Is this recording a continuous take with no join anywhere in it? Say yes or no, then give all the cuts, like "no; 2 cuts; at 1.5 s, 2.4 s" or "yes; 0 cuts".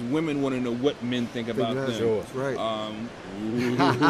no; 1 cut; at 3.1 s